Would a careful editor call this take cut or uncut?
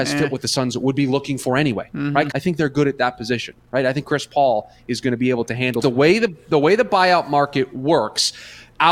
cut